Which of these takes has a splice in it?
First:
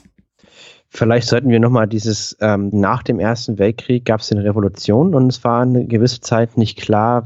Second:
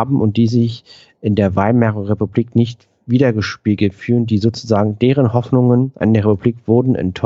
first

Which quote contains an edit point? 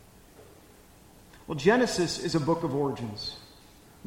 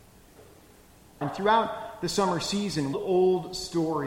second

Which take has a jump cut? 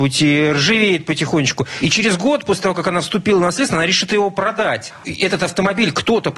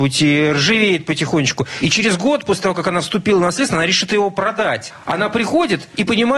first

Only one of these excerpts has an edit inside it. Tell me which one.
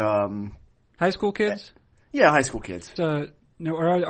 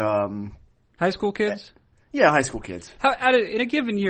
first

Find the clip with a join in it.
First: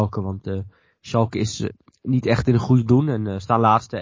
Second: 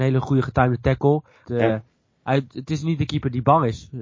second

